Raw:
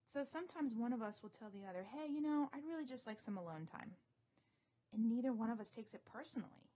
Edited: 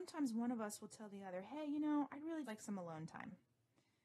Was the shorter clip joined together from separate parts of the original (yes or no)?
yes